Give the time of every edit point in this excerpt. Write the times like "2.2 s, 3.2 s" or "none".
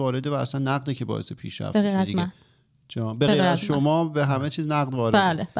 none